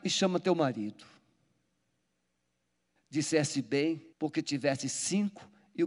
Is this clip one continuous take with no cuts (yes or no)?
no